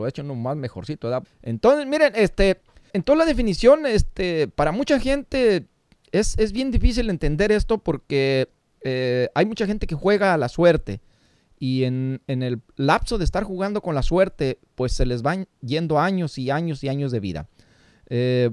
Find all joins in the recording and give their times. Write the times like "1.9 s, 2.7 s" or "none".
1.2 s, 2.9 s